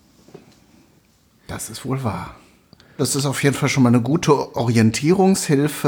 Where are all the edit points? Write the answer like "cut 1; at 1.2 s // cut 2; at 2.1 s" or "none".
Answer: cut 1; at 3.0 s

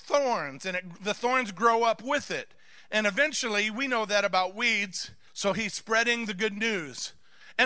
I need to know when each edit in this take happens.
cut 1; at 5.3 s

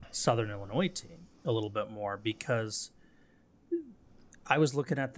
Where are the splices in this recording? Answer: cut 1; at 1.3 s

